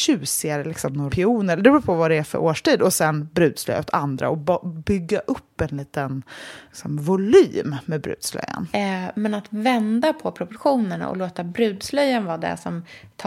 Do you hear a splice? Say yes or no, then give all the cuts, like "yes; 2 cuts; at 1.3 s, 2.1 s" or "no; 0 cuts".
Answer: yes; 2 cuts; at 1.1 s, 8.7 s